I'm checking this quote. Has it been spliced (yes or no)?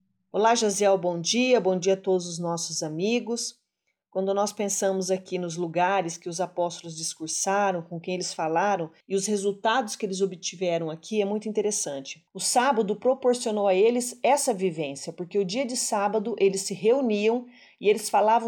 yes